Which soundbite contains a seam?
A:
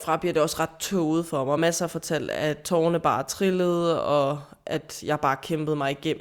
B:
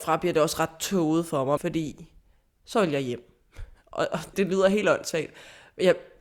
B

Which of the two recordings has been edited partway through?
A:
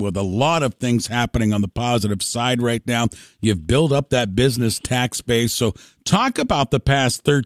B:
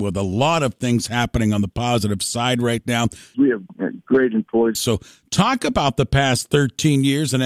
B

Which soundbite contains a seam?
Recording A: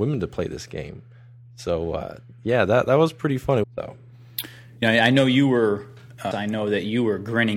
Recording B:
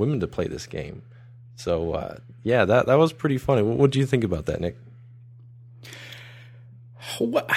A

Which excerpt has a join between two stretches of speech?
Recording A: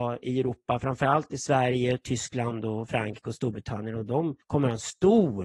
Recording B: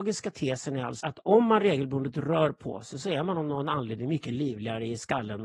B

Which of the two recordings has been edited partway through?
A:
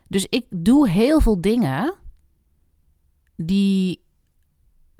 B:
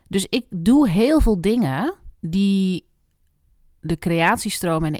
B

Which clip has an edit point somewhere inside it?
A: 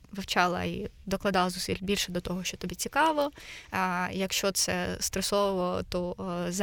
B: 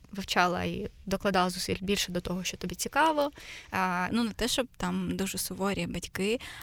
B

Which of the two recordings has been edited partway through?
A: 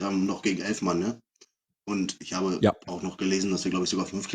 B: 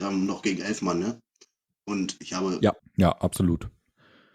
B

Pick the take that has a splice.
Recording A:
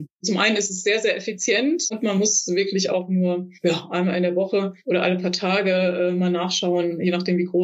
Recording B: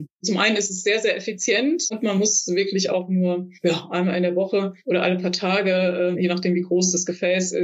B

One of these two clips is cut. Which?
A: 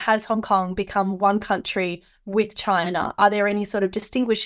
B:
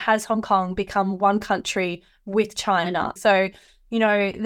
B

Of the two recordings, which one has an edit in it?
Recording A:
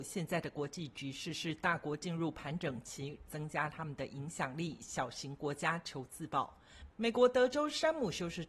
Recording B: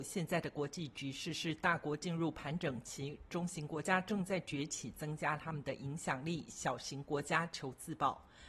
A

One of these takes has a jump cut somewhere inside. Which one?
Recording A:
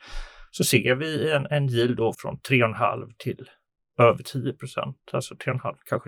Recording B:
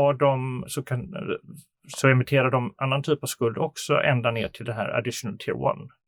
A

